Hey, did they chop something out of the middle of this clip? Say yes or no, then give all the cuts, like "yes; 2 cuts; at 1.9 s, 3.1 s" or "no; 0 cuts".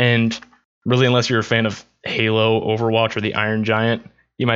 no; 0 cuts